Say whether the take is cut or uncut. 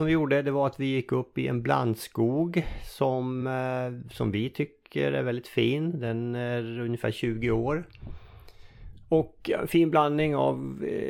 uncut